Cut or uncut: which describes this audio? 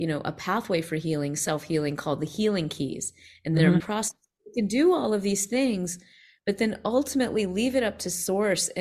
cut